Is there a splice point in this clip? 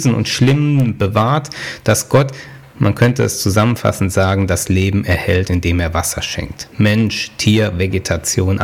no; 0 cuts

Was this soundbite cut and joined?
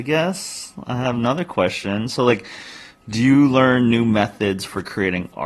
no; 0 cuts

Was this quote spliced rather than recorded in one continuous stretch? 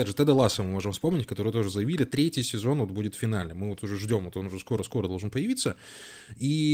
no; 0 cuts

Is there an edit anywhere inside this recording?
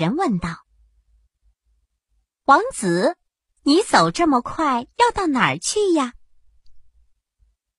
no; 0 cuts

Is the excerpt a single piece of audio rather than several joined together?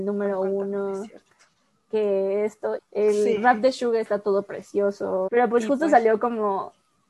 no; 2 cuts; at 2.8 s, 5.3 s

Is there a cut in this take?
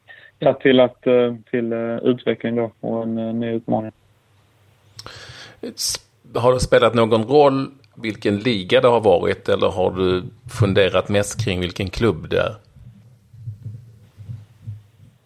yes; 1 cut; at 1.4 s

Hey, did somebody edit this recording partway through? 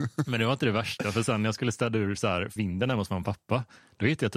yes; 1 cut; at 2.6 s

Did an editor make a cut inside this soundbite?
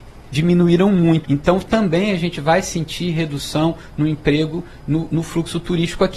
yes; 1 cut; at 1.2 s

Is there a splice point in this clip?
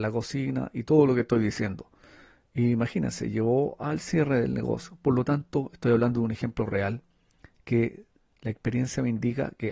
no; 0 cuts

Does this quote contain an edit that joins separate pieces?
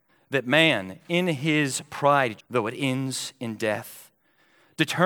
yes; 1 cut; at 2.4 s

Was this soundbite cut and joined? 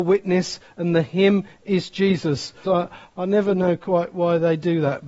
yes; 1 cut; at 2.6 s

